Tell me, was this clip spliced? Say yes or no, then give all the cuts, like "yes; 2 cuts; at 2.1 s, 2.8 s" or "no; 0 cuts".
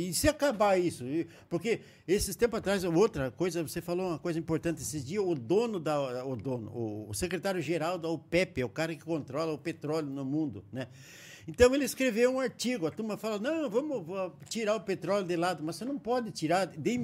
no; 0 cuts